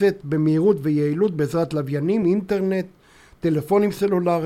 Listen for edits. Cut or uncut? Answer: uncut